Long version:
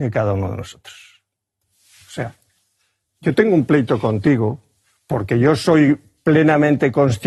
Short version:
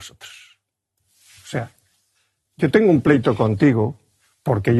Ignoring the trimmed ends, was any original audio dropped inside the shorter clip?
no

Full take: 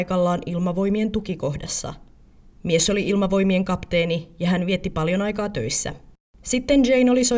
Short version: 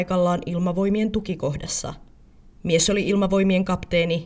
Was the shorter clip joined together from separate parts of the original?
no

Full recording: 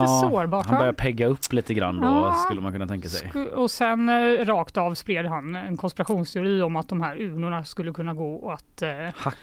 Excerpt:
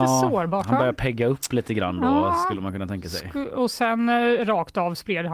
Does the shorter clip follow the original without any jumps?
yes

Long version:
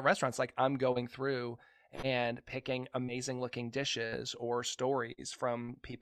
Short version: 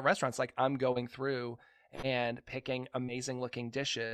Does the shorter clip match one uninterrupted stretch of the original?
yes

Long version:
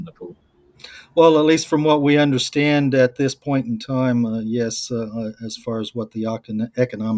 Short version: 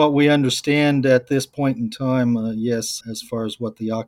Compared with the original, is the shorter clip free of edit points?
no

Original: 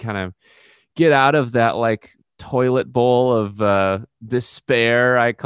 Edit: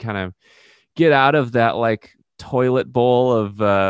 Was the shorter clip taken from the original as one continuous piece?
yes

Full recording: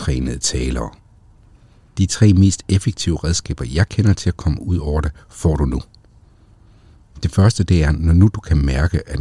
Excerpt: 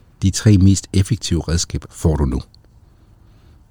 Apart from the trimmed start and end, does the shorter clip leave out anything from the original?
yes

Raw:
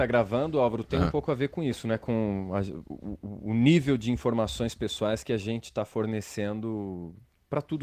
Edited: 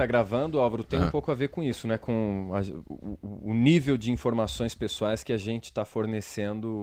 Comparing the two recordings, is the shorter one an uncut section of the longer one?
yes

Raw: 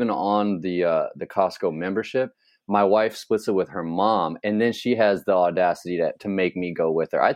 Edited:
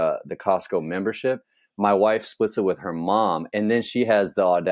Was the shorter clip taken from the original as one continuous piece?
yes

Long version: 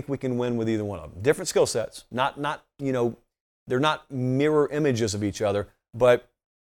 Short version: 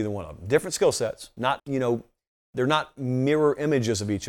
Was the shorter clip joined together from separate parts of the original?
yes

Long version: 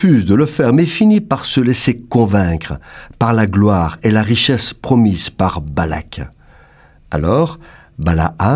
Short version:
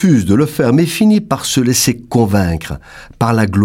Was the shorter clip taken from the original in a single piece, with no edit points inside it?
yes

